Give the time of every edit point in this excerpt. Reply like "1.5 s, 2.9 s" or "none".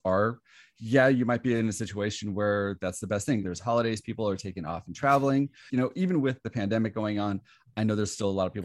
3.4 s, 5.7 s